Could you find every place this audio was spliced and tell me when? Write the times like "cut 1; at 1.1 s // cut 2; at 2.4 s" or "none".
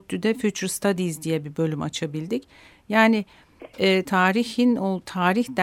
cut 1; at 4.0 s